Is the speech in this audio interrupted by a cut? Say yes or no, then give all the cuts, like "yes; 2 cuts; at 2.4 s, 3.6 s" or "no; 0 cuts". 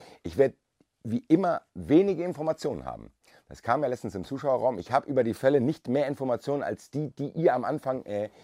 no; 0 cuts